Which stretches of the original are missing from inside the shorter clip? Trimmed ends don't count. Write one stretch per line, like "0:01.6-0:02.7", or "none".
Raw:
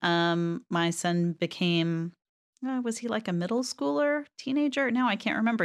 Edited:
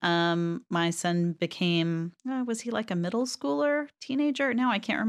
0:02.2-0:02.6